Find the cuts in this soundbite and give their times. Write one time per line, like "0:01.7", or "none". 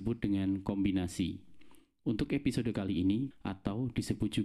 0:03.3